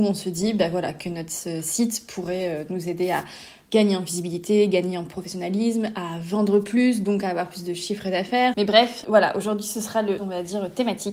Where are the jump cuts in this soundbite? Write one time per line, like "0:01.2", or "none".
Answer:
0:08.5
0:10.2